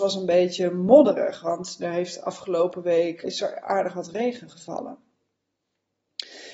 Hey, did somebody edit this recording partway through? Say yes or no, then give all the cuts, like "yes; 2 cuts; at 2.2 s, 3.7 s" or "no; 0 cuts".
yes; 1 cut; at 3.2 s